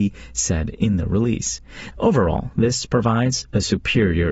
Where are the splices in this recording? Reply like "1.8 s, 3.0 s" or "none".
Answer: 1.9 s